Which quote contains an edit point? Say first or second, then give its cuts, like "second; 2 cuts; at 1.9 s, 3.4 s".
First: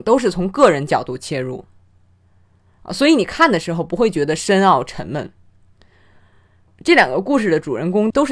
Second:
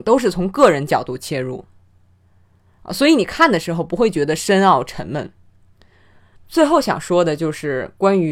second; 1 cut; at 6.4 s